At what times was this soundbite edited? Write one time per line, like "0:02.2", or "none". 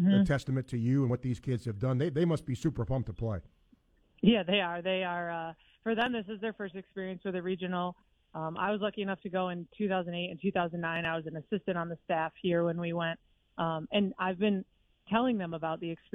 none